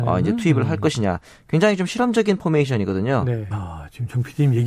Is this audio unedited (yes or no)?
no